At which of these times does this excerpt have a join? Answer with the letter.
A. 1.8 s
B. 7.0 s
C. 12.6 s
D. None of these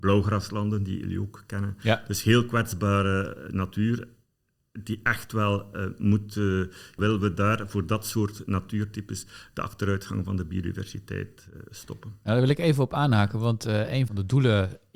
B